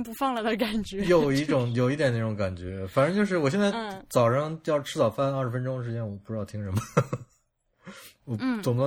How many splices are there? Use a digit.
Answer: 0